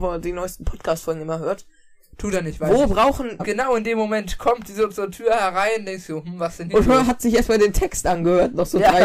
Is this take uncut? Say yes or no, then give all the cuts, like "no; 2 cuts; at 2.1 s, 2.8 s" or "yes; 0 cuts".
no; 1 cut; at 3.4 s